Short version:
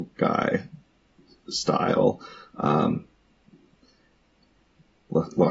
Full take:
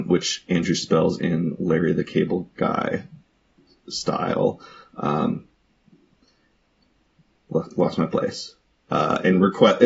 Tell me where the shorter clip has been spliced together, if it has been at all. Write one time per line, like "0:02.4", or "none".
none